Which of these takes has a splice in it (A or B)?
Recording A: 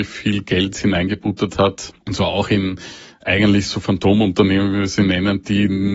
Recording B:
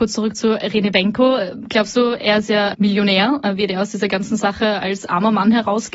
A